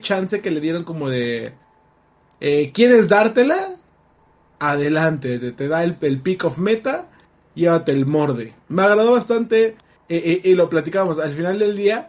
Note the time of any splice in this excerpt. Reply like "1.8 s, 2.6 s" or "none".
8.6 s, 10.0 s